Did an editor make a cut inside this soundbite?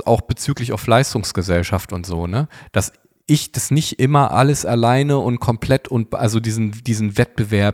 no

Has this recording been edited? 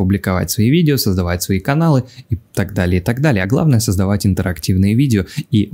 no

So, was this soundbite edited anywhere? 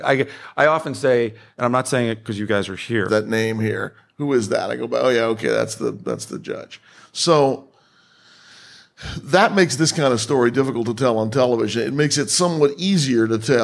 yes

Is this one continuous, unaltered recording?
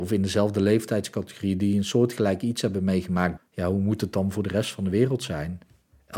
no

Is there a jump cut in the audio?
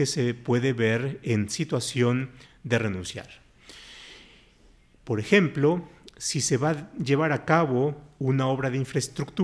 yes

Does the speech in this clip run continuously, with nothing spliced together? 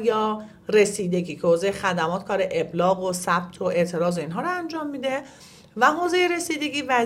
yes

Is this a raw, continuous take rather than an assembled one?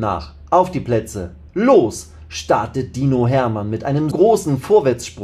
no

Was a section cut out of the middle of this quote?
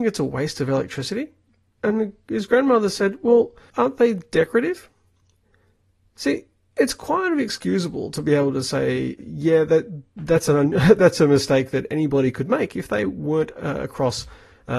yes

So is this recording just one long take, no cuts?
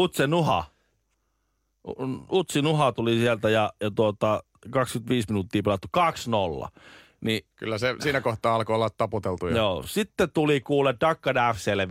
yes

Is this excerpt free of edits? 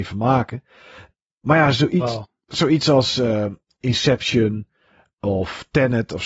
yes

